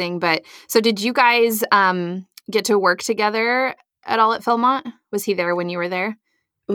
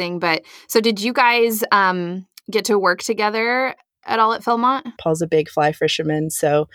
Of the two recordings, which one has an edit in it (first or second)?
second